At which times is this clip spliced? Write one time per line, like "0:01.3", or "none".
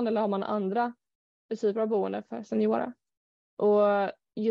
0:03.5